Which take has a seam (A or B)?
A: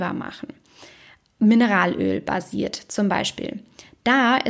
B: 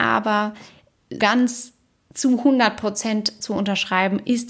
B